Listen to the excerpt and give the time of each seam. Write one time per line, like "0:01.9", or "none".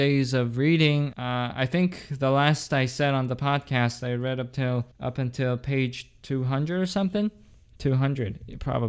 0:01.1
0:04.9